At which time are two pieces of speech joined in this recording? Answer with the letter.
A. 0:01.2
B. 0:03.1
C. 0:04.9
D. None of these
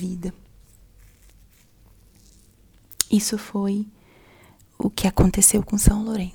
D